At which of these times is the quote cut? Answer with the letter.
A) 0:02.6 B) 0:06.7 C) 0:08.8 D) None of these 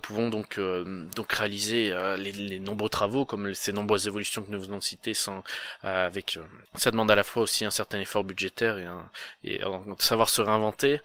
B